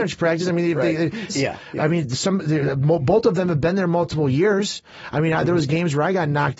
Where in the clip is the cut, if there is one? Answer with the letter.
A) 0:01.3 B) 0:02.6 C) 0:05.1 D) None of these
A